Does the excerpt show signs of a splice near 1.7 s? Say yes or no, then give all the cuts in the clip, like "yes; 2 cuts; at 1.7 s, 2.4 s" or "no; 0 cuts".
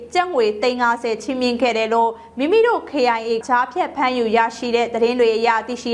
no; 1 cut; at 3.4 s